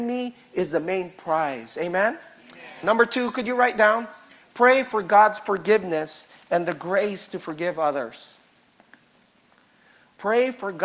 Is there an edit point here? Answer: yes; 1 cut; at 2.8 s

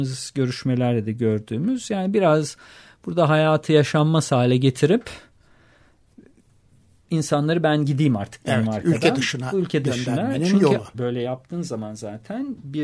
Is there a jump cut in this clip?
yes; 1 cut; at 10.9 s

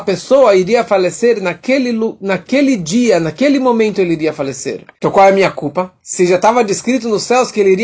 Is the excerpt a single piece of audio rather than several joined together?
no; 1 cut; at 4.9 s

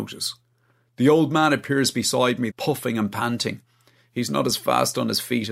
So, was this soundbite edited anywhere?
yes; 1 cut; at 2.5 s

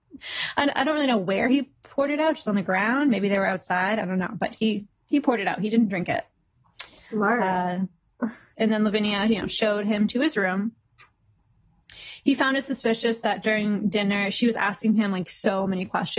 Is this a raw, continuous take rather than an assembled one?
no; 1 cut; at 8.5 s

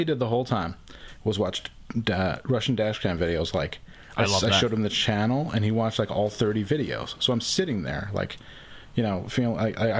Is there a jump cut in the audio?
no; 0 cuts

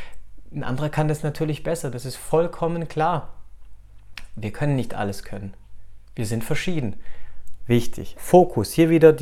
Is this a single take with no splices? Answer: no; 1 cut; at 8.1 s

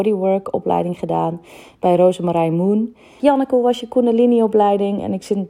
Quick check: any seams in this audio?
yes; 1 cut; at 3.2 s

